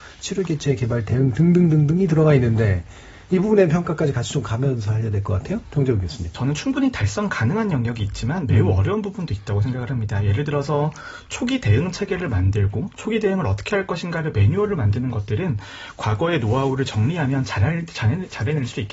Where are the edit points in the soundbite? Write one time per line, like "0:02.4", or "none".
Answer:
0:06.3

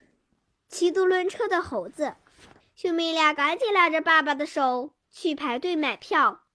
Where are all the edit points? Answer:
0:02.6
0:05.0

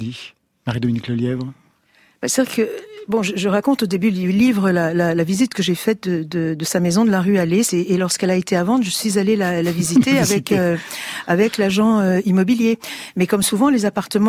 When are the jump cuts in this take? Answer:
0:07.7

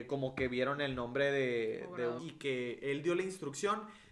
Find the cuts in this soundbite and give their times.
0:02.2

